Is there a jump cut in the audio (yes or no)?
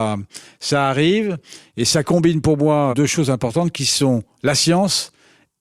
yes